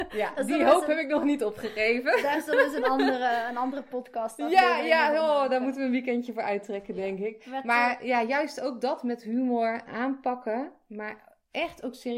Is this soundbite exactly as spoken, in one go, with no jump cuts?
no; 1 cut; at 9.9 s

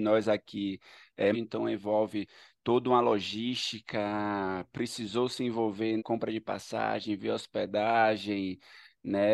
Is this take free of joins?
no; 2 cuts; at 1.3 s, 6.0 s

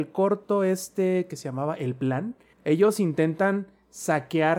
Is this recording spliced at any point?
yes; 1 cut; at 2.5 s

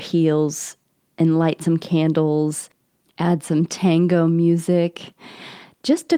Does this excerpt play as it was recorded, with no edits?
yes; 0 cuts

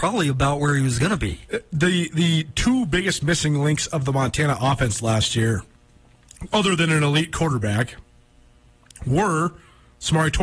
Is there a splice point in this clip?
no; 0 cuts

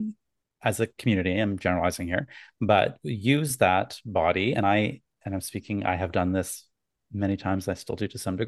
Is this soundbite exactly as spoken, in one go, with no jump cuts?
yes; 0 cuts

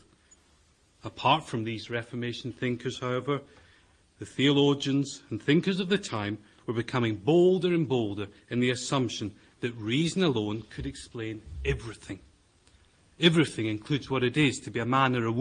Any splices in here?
no; 0 cuts

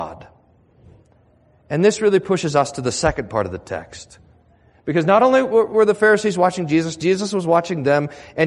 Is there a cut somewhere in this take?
no; 0 cuts

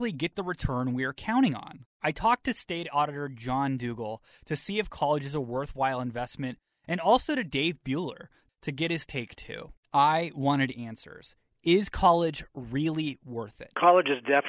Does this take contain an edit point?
yes; 2 cuts; at 1.9 s, 8.5 s

